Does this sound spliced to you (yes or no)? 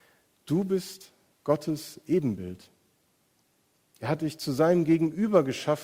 no